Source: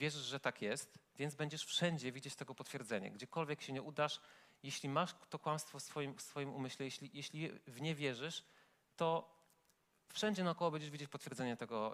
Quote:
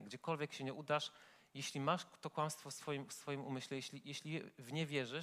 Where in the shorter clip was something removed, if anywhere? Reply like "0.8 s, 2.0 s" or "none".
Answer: none

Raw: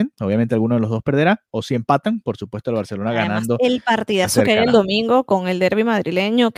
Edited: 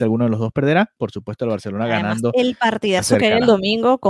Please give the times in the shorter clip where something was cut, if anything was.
1.0 s

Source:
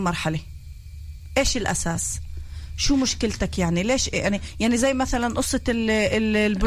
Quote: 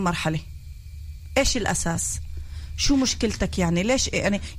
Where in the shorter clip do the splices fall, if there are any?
none

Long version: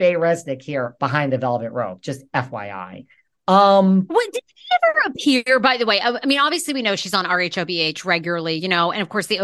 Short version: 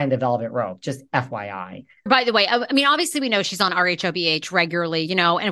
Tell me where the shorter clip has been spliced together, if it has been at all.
2.1 s

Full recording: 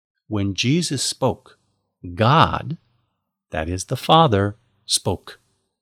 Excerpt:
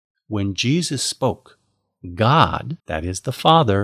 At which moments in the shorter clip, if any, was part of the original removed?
2.8 s

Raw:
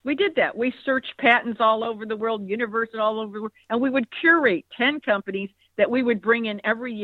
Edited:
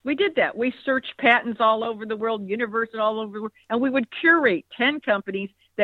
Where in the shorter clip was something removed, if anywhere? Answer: none

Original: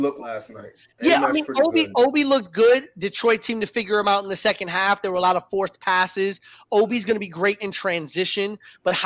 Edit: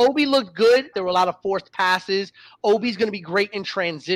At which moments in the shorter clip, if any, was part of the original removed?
0.9 s

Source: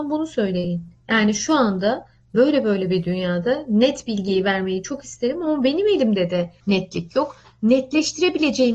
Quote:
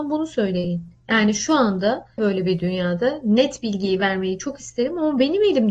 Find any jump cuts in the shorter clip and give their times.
2.2 s

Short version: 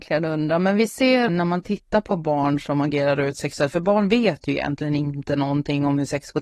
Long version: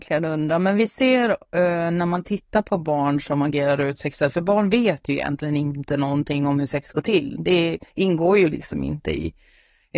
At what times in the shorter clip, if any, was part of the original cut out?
1.3 s

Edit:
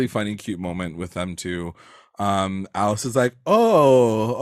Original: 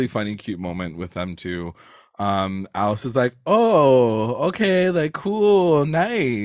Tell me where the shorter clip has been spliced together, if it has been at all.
none

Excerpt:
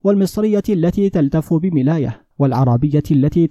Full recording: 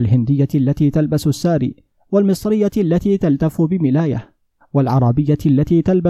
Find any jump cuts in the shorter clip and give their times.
2.3 s

